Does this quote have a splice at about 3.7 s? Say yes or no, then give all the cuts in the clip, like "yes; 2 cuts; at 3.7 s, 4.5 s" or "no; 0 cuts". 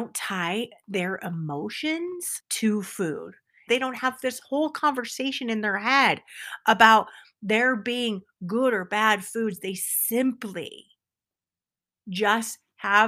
yes; 1 cut; at 3.7 s